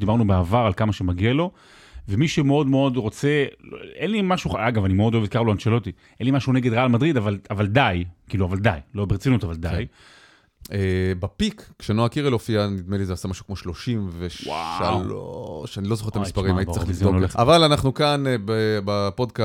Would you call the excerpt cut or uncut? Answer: cut